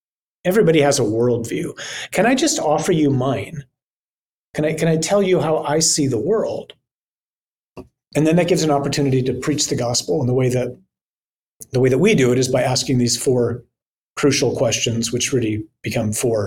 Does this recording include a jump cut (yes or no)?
no